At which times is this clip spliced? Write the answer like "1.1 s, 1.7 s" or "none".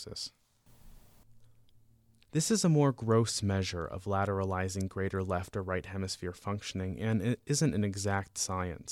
2.2 s

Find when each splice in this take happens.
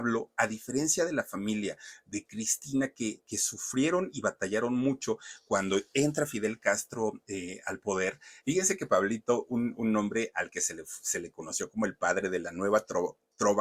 8.4 s

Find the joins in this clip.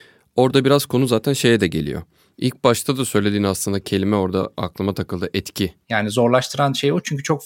2.3 s, 5.8 s

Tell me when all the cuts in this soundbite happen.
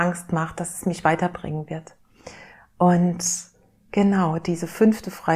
none

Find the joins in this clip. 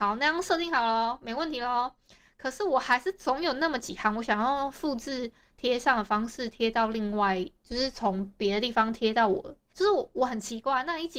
9.7 s

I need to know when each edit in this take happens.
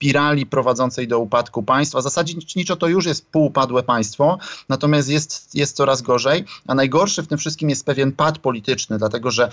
none

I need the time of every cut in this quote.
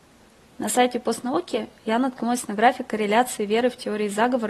none

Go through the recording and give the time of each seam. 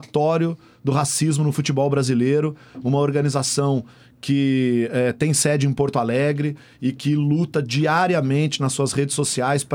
none

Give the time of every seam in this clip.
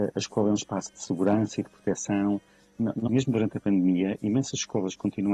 3.1 s

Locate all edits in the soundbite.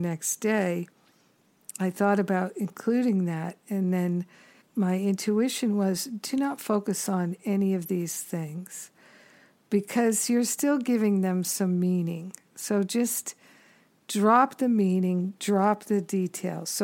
4.6 s

